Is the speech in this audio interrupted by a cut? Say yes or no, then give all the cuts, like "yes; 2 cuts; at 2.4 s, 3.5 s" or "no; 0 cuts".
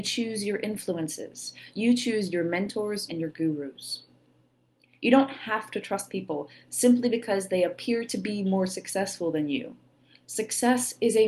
yes; 1 cut; at 3.1 s